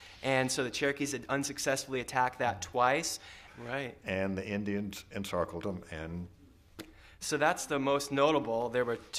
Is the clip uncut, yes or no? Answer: no